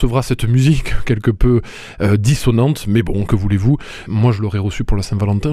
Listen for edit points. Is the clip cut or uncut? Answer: cut